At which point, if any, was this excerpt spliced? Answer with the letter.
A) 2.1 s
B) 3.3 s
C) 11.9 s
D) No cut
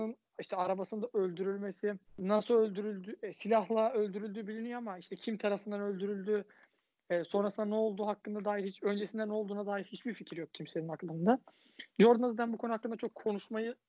A